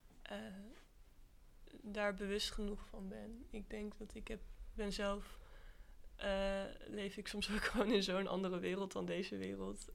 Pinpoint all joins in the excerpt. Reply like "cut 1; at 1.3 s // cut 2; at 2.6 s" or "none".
none